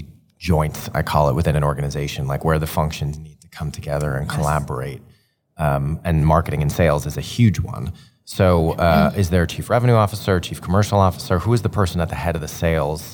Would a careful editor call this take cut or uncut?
uncut